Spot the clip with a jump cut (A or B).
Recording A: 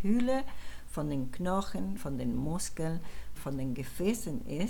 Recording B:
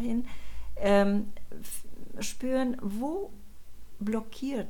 A